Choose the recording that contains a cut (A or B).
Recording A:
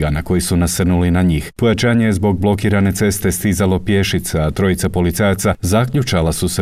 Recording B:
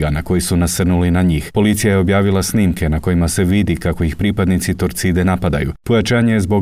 A